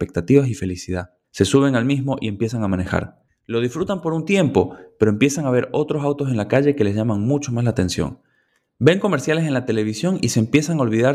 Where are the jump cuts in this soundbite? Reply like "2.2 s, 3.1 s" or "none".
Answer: none